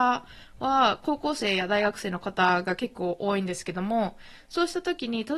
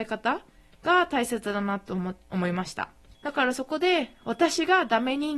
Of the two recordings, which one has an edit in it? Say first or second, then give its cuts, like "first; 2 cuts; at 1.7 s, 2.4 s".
second; 1 cut; at 3.1 s